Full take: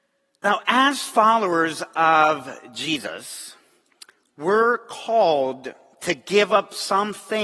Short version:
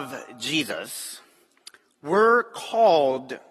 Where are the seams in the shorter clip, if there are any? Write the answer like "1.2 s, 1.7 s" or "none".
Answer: none